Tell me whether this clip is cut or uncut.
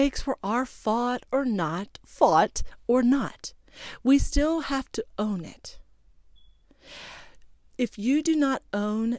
cut